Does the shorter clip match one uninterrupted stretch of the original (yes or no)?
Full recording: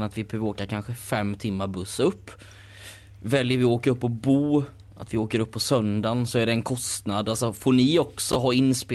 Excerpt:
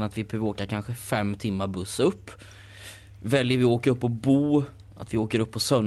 yes